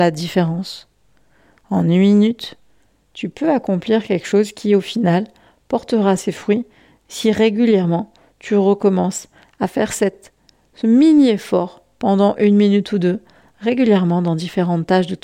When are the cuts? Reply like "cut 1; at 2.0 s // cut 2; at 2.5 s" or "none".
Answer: none